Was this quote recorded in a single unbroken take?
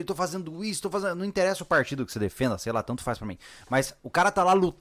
yes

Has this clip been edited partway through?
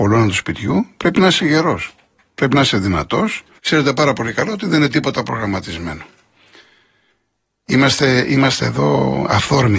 yes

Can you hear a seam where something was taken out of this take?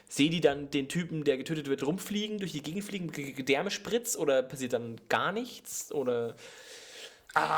no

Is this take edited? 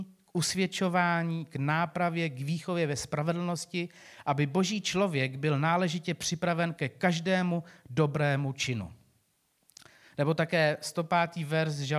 no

